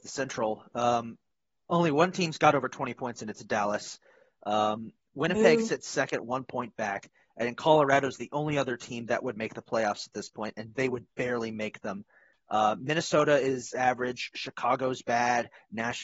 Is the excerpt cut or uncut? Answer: uncut